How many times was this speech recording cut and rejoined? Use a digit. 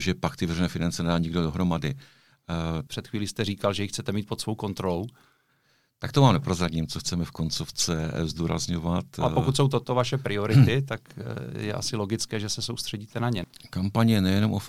1